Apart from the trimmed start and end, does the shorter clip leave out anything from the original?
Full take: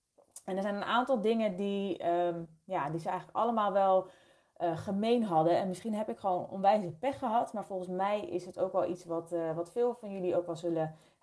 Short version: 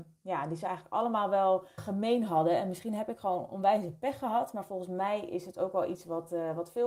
yes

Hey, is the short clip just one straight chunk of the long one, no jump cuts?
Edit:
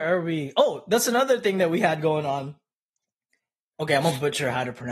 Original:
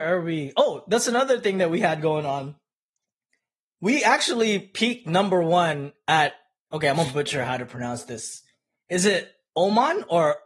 no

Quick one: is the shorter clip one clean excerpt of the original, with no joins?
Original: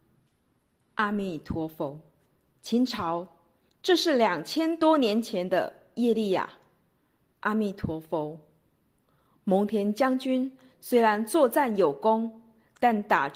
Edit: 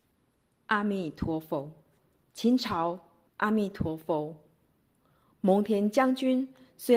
no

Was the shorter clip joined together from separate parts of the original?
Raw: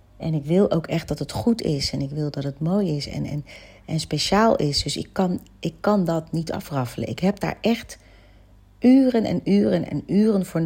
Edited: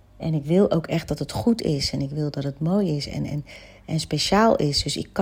no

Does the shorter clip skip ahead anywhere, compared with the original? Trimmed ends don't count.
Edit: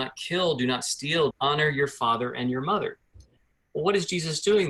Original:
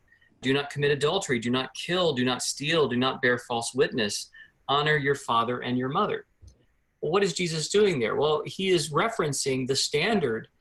yes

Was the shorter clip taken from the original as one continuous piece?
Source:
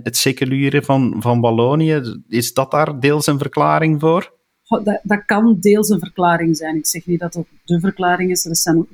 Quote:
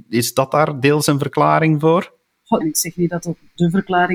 no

